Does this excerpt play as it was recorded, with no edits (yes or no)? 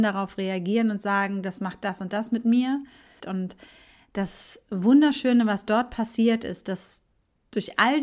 no